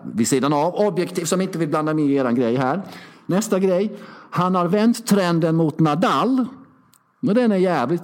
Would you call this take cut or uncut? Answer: uncut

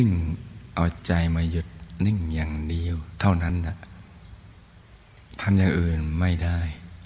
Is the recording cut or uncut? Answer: uncut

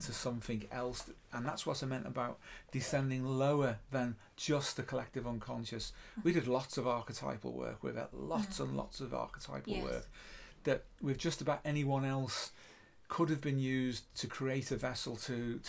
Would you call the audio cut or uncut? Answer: uncut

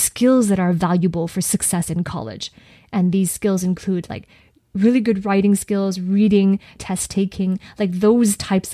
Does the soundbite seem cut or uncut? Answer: cut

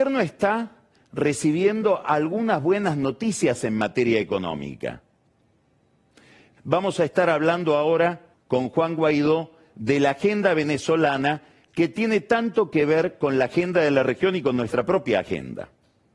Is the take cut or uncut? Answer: cut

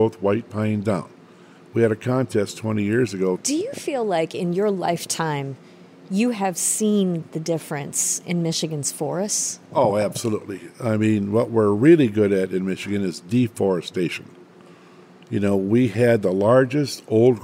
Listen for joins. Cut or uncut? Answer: cut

